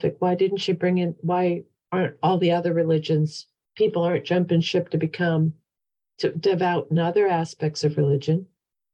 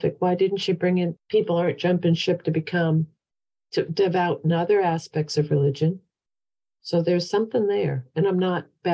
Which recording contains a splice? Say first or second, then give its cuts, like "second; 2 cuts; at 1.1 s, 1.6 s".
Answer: second; 1 cut; at 1.2 s